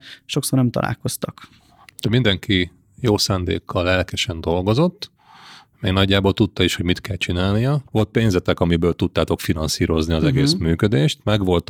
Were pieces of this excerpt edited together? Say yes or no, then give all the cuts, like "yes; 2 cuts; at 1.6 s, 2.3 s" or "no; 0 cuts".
yes; 1 cut; at 7.9 s